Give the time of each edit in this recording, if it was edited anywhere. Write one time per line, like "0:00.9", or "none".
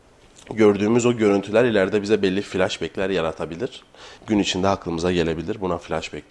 0:04.2